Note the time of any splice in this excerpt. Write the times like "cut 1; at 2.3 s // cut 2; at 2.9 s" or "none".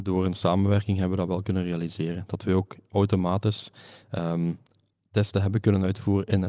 none